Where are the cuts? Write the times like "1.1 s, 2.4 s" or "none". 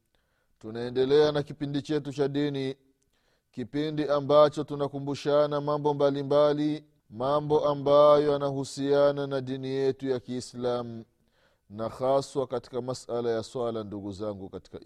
7.0 s